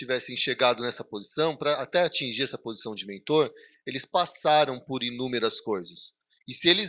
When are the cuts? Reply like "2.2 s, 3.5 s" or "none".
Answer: none

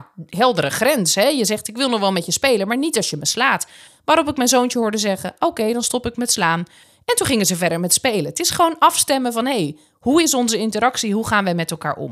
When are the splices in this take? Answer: none

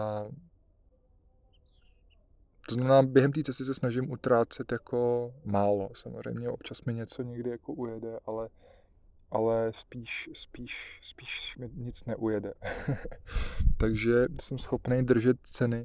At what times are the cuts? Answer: none

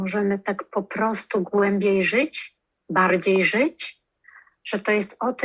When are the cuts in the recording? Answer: none

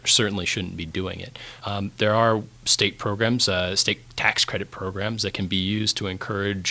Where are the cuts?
none

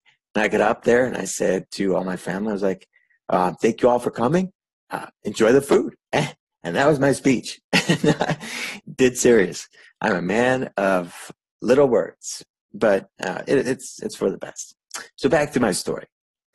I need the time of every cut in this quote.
none

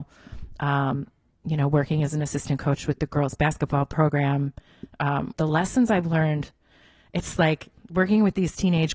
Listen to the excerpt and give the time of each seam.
5.3 s

